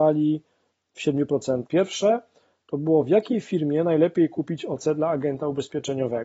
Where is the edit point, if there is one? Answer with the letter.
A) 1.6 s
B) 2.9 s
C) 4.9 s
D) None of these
A